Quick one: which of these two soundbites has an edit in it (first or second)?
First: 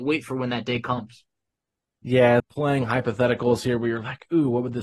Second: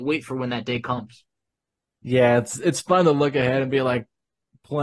first